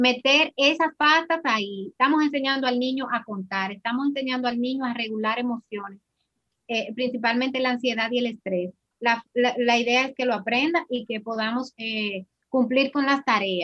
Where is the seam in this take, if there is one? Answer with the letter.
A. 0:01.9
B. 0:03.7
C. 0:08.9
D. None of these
C